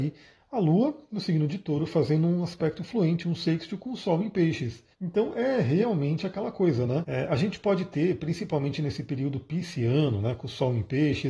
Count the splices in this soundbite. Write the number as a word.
two